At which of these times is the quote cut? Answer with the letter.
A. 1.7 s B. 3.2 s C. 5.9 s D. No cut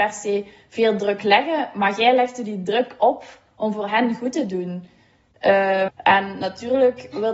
C